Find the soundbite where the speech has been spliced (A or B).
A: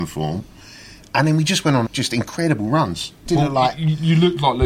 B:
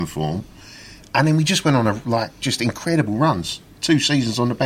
A